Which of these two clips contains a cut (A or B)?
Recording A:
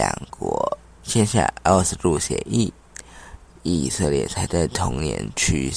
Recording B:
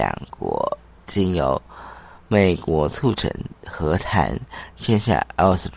A